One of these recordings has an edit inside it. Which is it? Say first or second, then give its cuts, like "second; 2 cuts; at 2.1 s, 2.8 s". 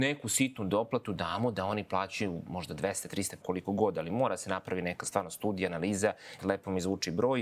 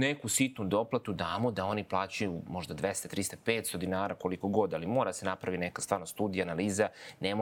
first; 2 cuts; at 3.4 s, 6.4 s